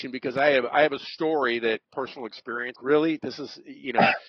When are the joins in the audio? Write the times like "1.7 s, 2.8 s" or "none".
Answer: 2.7 s